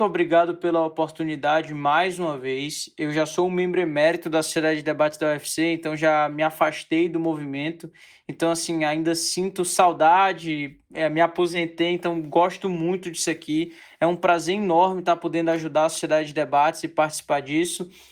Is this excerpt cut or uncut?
uncut